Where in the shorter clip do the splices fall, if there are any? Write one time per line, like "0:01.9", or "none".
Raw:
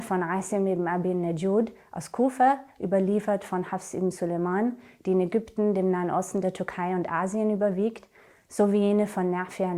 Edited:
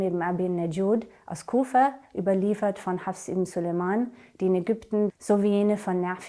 0:05.1